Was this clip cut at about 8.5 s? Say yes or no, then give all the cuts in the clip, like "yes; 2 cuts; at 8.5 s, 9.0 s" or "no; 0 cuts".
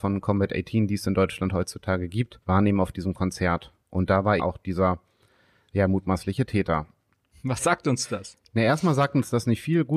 no; 2 cuts; at 2.4 s, 4.4 s